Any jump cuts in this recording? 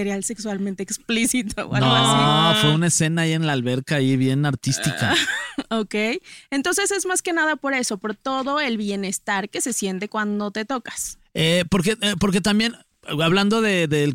no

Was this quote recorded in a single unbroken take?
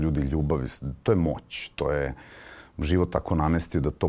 yes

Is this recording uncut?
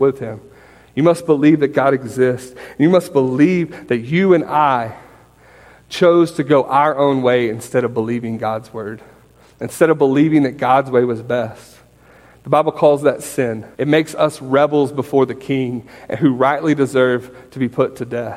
no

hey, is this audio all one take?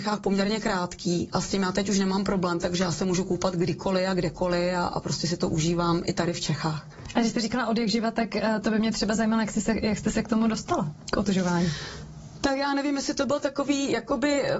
yes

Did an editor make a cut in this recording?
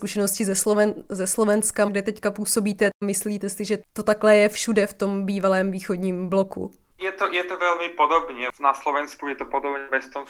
yes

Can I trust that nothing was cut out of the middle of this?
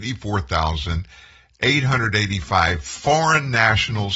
yes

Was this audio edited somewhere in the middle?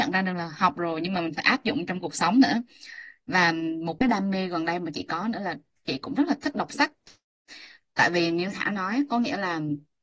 no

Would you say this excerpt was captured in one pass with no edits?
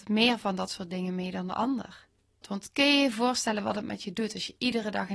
no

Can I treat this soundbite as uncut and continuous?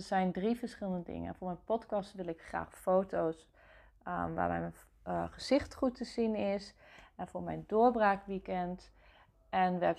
yes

